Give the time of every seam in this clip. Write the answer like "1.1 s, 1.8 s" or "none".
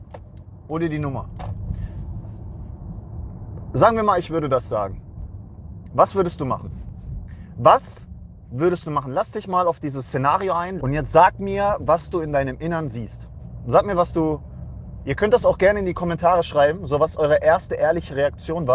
10.8 s